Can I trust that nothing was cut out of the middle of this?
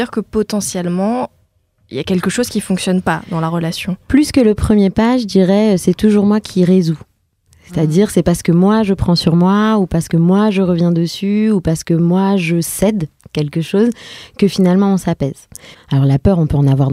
no; 1 cut; at 15.7 s

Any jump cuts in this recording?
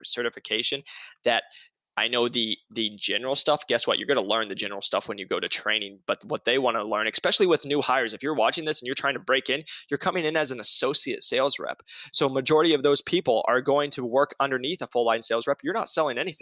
no; 0 cuts

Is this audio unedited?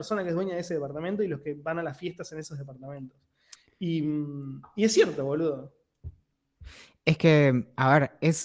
yes; 0 cuts

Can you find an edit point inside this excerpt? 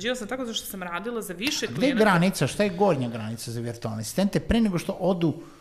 no; 0 cuts

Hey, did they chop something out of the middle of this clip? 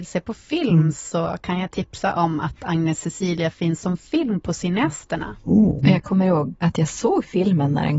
yes; 1 cut; at 5.8 s

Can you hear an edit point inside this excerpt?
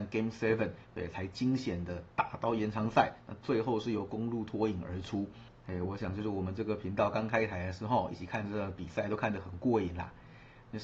no; 0 cuts

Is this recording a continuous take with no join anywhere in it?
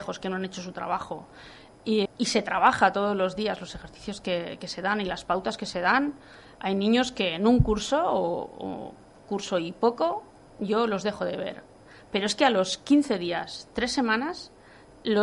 no; 1 cut; at 2.1 s

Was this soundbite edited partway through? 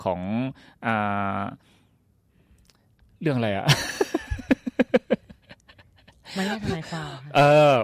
no; 0 cuts

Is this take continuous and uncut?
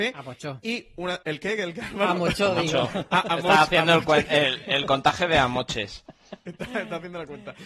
no; 1 cut; at 1.2 s

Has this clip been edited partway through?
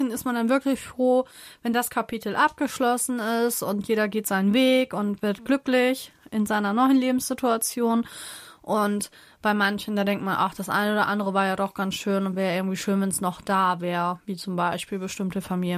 no; 0 cuts

